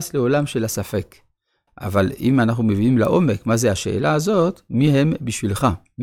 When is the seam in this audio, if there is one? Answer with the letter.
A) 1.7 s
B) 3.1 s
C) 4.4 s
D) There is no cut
A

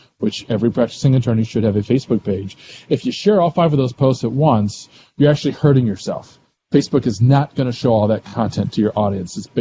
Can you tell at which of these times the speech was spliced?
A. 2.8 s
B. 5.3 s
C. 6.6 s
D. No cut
D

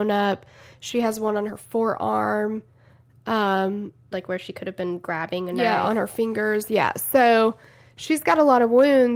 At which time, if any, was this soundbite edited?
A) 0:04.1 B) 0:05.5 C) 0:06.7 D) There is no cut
A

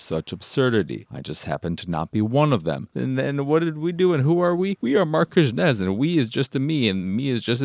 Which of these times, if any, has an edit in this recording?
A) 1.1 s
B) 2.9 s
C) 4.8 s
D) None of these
B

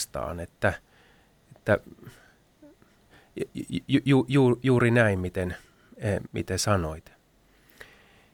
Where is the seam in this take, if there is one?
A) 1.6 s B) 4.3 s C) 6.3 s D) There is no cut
C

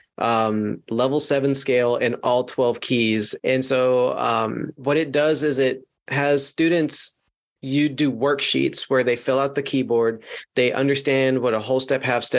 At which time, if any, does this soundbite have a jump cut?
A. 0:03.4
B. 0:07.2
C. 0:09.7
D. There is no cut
A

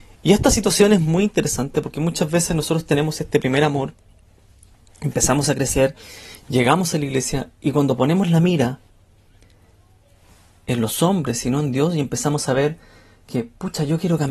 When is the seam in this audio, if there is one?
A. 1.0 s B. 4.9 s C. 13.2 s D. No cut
D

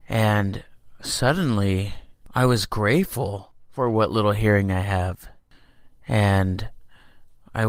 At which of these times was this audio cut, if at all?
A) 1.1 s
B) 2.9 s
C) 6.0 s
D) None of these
D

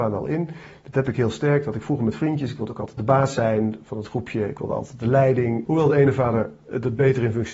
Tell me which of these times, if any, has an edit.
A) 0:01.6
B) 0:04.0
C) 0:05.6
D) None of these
C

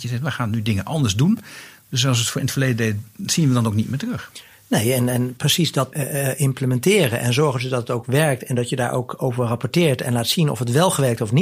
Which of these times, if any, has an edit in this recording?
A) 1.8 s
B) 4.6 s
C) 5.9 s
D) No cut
C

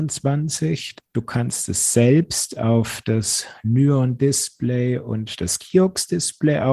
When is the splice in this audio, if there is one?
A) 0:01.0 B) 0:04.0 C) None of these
A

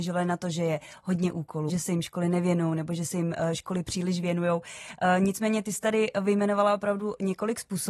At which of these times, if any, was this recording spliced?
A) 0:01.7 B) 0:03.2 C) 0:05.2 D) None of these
A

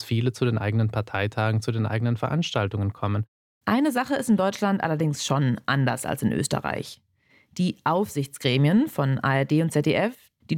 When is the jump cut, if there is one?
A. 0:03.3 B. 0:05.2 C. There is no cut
C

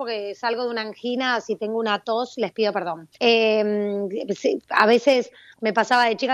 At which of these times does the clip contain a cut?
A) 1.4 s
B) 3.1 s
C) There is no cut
B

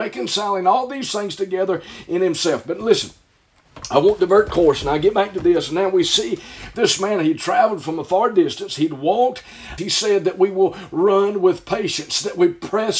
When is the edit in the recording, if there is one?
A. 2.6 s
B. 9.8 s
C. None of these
B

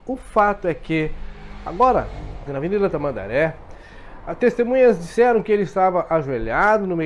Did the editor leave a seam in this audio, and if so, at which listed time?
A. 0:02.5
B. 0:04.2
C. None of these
A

